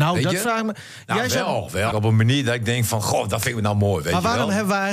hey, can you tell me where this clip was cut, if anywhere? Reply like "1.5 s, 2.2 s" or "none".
1.9 s